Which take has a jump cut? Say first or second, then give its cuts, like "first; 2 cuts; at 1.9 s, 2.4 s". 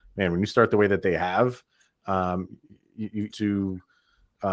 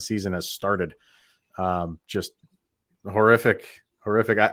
first; 1 cut; at 3.3 s